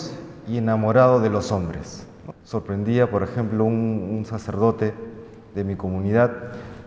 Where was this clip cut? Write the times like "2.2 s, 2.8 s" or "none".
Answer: 2.3 s